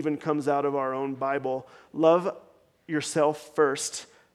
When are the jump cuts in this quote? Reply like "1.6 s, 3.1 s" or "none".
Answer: none